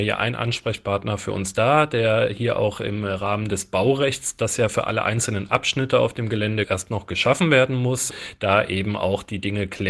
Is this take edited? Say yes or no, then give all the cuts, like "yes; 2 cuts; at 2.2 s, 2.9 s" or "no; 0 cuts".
no; 0 cuts